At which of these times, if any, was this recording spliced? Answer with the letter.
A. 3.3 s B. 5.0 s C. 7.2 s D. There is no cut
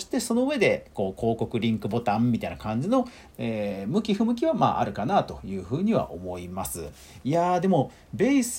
A